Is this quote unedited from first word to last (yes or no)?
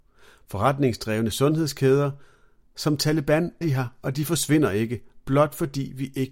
no